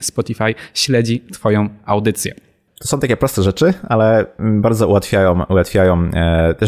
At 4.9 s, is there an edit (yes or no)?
no